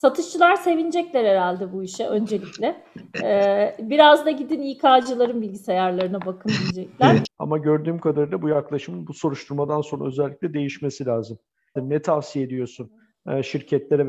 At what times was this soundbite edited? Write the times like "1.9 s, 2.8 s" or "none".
7.3 s, 11.8 s